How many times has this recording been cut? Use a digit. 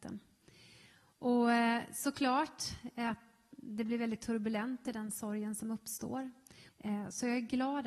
1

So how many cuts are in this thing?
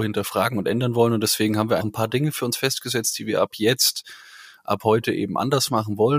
1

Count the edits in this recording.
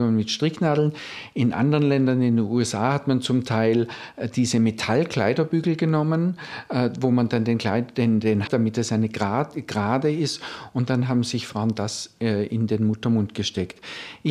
1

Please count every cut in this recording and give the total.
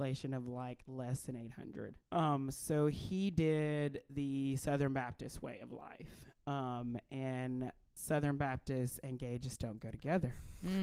1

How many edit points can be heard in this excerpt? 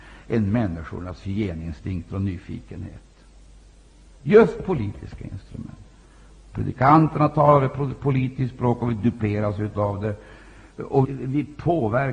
2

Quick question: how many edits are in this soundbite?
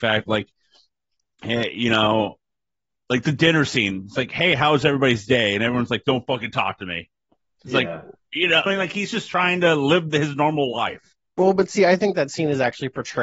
1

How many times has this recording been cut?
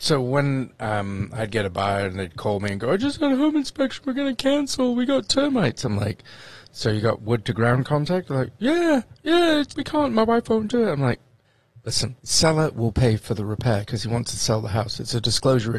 2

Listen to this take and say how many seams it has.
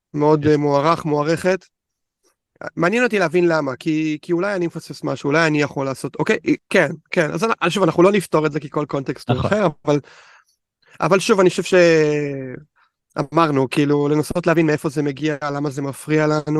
1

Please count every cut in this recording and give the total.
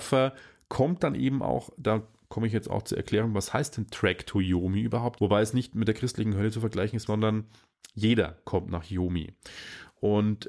2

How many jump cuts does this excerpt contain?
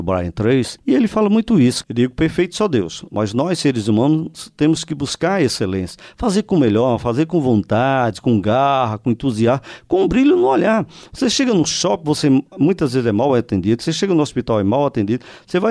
1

